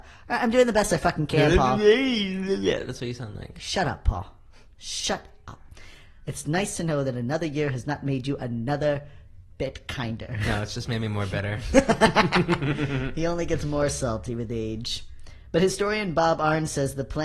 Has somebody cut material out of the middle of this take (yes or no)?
no